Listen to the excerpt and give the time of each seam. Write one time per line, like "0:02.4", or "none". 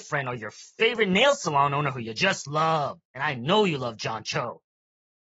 0:03.1